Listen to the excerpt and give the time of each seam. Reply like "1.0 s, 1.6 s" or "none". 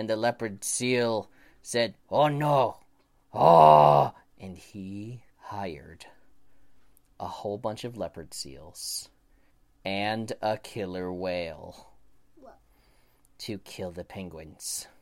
5.3 s